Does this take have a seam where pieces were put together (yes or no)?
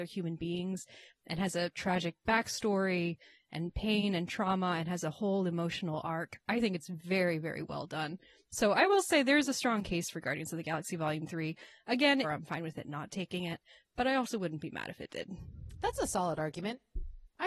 yes